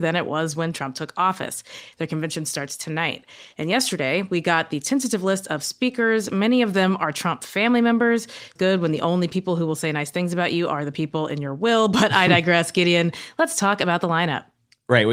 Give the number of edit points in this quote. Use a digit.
1